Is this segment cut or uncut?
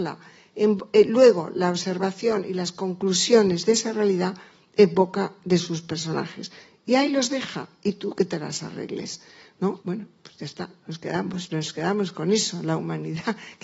cut